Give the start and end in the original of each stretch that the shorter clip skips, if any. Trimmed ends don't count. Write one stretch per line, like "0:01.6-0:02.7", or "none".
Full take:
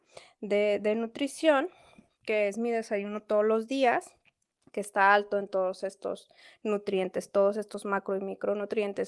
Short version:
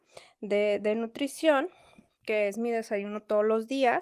none